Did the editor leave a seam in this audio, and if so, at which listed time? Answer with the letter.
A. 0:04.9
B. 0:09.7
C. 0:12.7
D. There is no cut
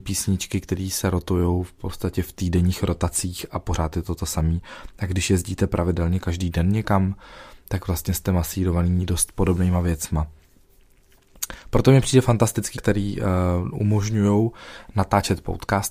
C